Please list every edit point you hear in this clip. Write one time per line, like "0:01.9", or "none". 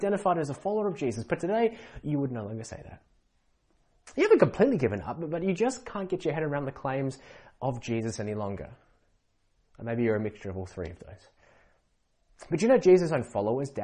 none